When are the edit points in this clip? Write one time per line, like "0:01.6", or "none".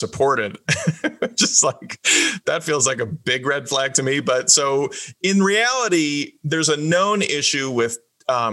none

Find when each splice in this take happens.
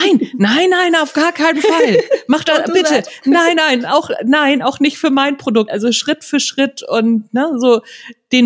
0:05.7

